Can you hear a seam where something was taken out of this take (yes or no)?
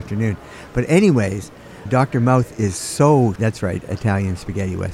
yes